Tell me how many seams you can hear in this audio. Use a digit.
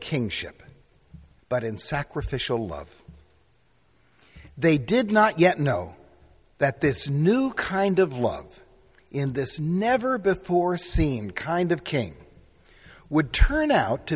1